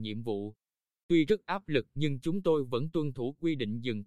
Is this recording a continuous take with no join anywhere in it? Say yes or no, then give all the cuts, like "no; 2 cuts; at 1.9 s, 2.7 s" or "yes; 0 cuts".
no; 1 cut; at 1.0 s